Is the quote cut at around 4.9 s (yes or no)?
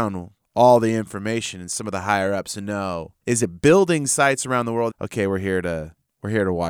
yes